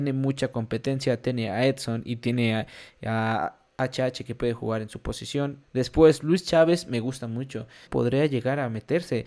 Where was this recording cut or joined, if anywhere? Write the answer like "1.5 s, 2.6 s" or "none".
5.6 s, 7.8 s